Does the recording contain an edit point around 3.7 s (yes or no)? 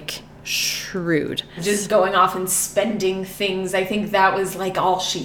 no